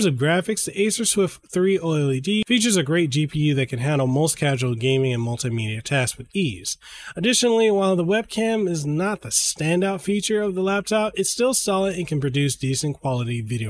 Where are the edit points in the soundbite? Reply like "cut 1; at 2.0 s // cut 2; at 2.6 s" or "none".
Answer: none